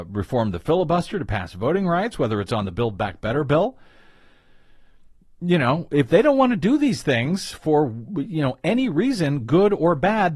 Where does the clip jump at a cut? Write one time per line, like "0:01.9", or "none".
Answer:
none